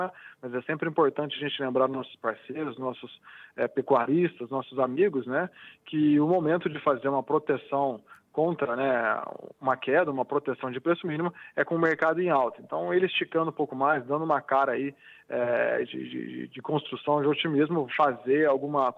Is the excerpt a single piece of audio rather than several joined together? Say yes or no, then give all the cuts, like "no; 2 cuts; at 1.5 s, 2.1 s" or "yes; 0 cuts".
no; 1 cut; at 17.9 s